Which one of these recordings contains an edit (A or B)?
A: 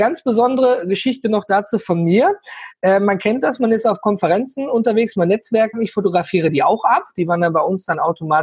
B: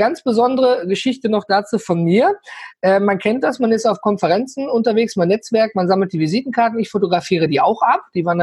A